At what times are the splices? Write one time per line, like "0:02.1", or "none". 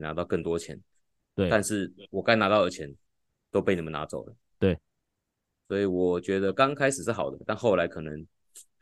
none